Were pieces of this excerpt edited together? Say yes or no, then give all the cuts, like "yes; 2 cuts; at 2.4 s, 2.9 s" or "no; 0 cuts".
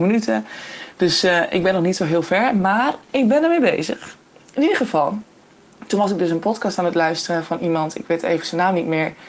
no; 0 cuts